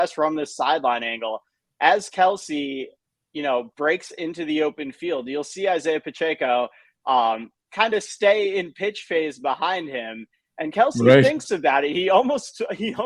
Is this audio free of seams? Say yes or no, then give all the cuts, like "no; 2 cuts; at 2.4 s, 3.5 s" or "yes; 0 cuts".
yes; 0 cuts